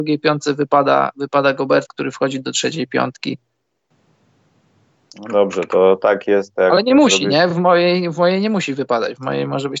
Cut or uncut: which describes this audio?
uncut